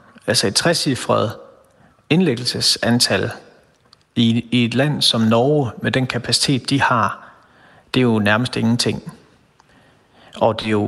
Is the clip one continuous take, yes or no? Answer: yes